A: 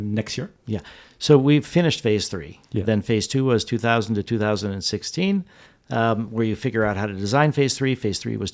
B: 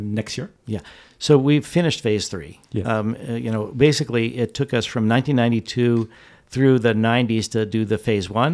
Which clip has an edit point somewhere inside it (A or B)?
A